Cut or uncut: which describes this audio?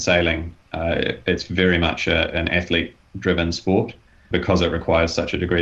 cut